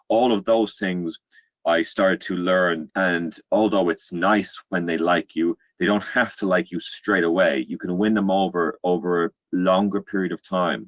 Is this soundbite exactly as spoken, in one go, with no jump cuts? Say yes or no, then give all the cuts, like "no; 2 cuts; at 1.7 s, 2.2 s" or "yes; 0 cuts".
no; 1 cut; at 2.9 s